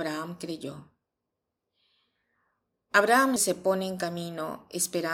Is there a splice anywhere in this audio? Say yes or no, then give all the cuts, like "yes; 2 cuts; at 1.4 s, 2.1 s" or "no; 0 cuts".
yes; 1 cut; at 3.4 s